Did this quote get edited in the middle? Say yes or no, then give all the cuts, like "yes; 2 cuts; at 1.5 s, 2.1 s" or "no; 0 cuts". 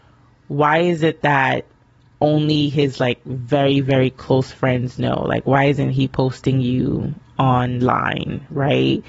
no; 0 cuts